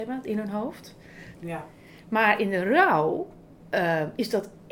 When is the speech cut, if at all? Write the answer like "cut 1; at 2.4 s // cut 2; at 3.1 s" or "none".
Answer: cut 1; at 1.3 s